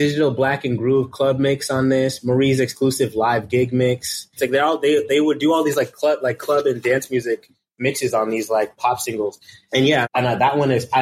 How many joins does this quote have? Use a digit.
2